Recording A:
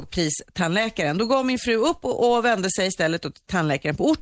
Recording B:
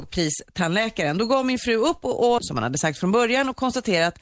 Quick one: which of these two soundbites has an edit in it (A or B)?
B